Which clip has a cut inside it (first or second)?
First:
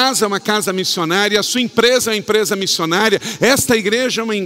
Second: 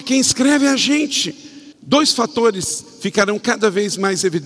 second